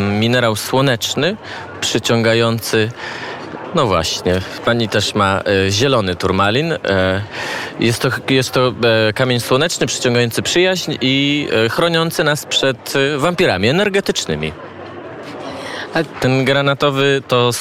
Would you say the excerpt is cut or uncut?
cut